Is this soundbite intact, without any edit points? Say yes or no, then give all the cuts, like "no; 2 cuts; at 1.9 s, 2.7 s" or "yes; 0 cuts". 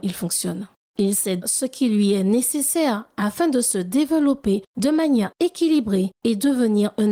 no; 1 cut; at 1.4 s